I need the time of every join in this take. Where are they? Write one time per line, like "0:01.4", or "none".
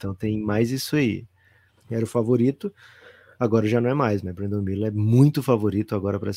0:01.7